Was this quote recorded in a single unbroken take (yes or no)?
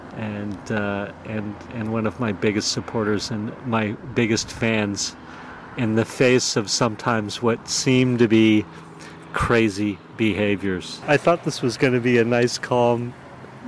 no